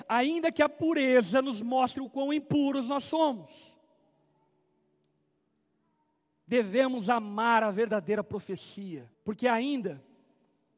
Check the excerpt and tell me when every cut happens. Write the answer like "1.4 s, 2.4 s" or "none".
9.1 s